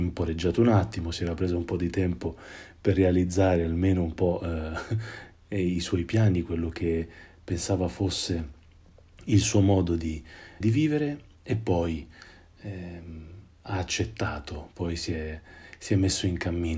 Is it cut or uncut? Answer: cut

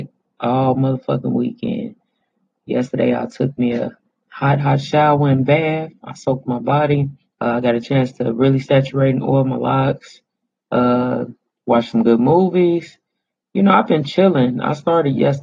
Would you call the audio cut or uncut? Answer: cut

